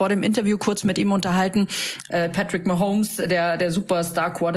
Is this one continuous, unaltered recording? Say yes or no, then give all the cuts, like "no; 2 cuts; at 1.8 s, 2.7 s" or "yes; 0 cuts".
no; 1 cut; at 2.1 s